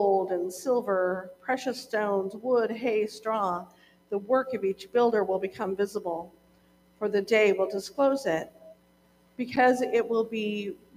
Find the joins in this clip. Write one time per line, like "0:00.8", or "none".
none